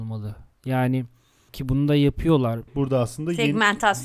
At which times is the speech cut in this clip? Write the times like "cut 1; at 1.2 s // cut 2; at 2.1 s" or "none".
cut 1; at 2.7 s